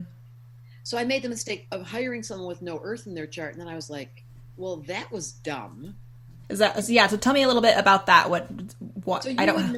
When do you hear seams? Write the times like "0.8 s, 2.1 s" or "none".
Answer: 6.4 s